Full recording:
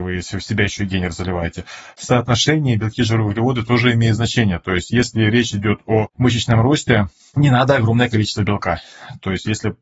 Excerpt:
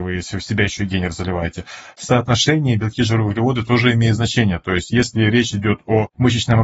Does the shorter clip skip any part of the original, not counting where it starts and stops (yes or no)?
no